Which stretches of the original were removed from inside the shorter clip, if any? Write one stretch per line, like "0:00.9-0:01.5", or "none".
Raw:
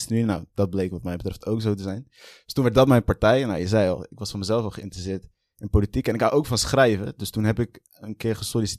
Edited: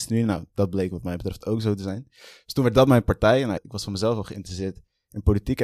0:03.6-0:04.0